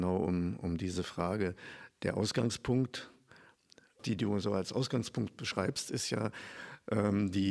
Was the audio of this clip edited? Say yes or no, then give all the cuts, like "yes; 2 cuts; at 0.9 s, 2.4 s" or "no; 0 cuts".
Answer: yes; 1 cut; at 4.0 s